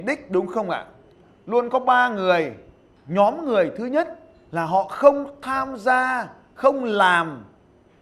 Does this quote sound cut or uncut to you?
uncut